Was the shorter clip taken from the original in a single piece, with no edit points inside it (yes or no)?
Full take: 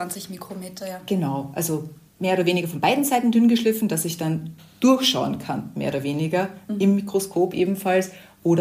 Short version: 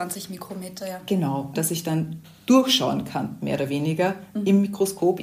no